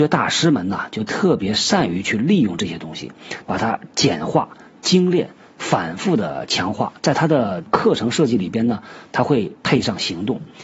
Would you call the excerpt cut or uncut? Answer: cut